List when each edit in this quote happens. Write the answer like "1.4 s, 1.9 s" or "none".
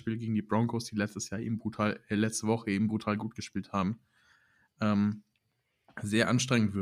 none